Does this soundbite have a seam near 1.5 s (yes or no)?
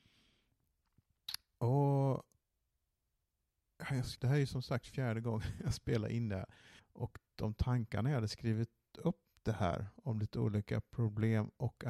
no